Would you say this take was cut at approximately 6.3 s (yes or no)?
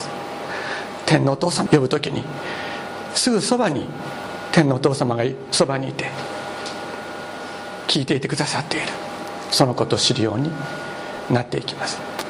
no